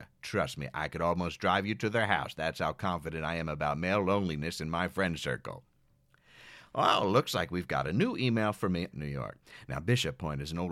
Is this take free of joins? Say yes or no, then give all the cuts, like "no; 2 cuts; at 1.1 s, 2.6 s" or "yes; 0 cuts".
no; 1 cut; at 8.9 s